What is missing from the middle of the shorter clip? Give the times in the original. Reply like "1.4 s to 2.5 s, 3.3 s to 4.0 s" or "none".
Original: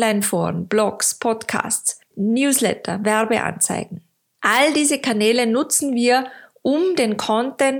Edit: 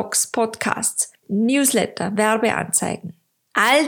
none